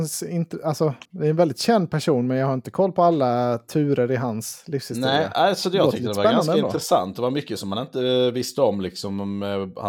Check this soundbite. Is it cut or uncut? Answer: uncut